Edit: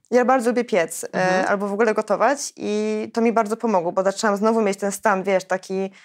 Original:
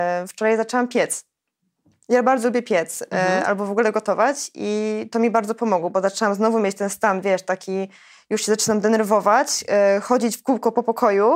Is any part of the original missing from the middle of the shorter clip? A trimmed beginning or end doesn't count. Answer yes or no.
no